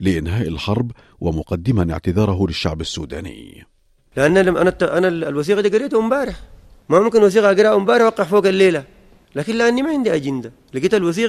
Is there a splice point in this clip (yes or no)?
no